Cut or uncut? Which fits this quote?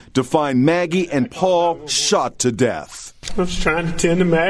cut